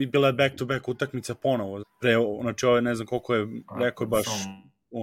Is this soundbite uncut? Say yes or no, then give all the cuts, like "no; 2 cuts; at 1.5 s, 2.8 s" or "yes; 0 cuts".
no; 1 cut; at 1.8 s